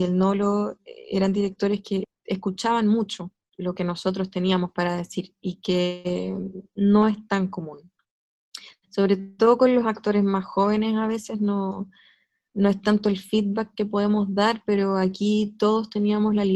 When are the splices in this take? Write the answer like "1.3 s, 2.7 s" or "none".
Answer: none